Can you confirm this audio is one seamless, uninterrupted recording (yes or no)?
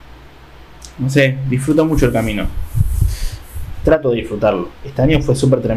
no